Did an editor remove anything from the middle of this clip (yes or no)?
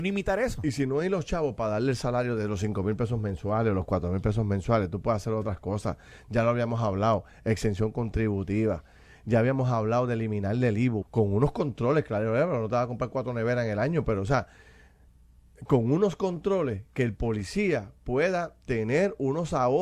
yes